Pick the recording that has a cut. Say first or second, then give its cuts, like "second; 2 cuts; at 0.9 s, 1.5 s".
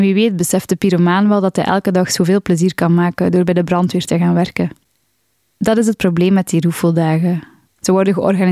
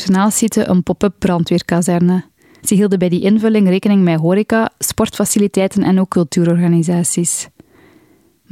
second; 1 cut; at 2.6 s